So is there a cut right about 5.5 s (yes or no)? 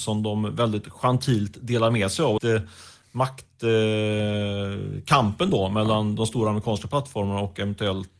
no